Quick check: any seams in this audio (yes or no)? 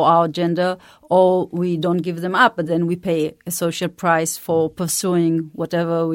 no